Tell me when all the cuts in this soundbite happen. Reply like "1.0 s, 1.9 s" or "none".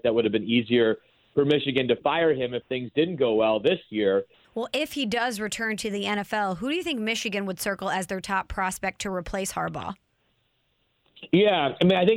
4.4 s